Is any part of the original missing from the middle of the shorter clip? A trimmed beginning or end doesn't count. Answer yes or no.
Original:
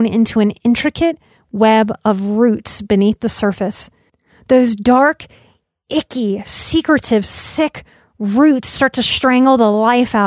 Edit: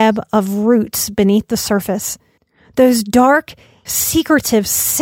yes